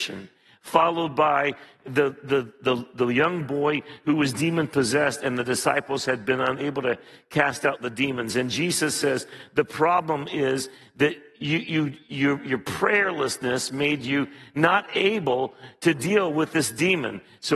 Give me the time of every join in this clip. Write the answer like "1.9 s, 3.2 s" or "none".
none

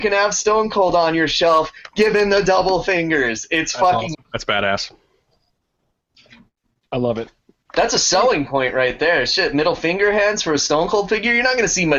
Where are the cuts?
4.1 s

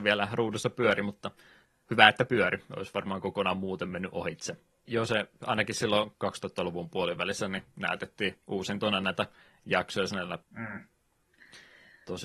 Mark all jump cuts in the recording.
4.9 s, 10.4 s

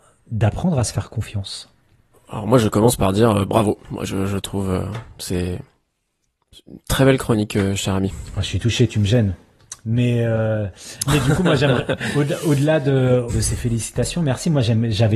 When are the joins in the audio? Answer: 13.3 s

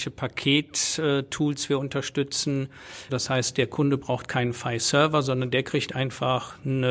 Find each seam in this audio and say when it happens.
3.1 s

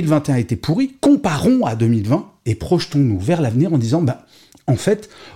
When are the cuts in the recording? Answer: none

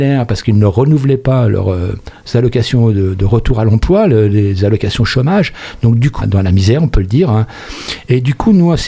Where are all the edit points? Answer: 6.2 s

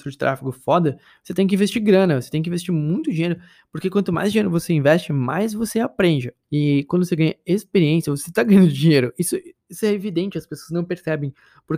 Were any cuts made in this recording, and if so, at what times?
6.4 s

